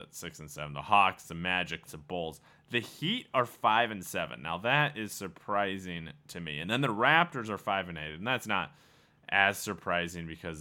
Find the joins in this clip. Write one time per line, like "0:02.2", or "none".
0:01.9